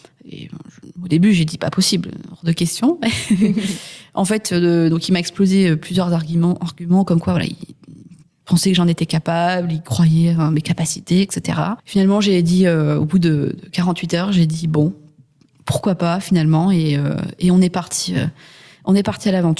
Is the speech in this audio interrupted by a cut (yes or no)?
no